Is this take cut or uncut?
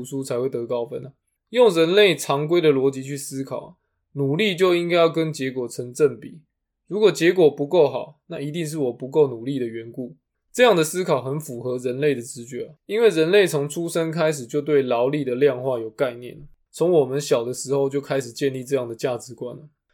cut